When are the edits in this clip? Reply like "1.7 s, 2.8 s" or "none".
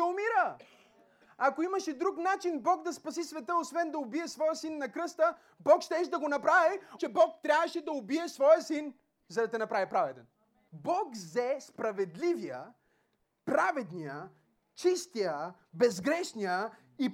7.0 s, 10.7 s